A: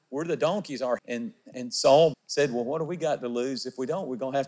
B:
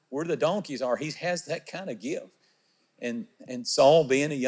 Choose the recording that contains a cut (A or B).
A